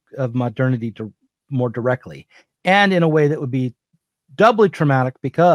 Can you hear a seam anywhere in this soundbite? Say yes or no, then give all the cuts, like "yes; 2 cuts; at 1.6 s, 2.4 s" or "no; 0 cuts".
no; 0 cuts